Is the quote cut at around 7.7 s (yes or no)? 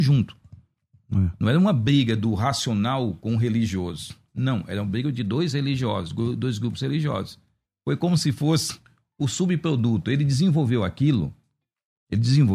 yes